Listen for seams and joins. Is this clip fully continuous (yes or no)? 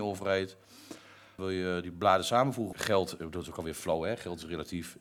no